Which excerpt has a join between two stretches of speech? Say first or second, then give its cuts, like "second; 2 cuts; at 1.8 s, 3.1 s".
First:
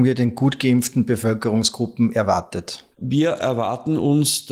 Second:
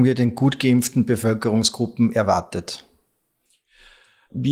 first; 1 cut; at 2.9 s